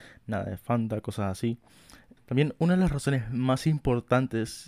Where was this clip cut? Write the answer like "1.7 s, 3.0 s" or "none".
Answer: 2.2 s